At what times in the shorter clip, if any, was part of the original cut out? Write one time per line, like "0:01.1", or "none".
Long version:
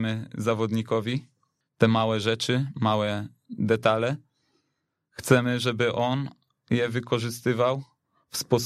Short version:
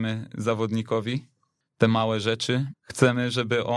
0:02.7